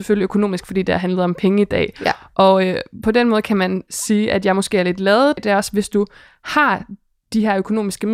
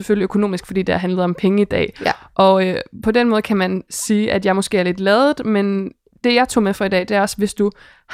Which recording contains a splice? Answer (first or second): first